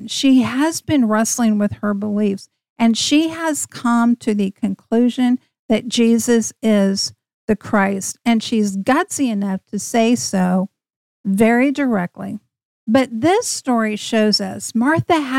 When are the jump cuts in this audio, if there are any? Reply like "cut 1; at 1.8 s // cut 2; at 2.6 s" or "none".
cut 1; at 12.7 s